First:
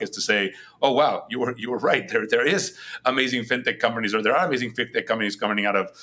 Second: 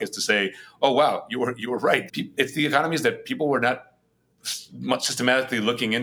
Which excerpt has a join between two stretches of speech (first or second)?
second